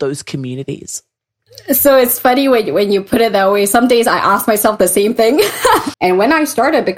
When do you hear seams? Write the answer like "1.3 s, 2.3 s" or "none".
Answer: 5.9 s